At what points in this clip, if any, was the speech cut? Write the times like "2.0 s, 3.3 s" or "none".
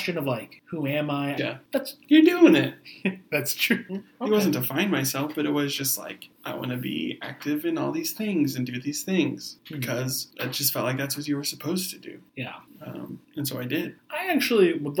1.4 s, 3.9 s